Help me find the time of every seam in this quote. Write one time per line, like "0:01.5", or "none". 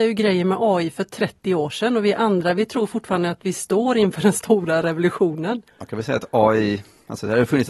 0:05.7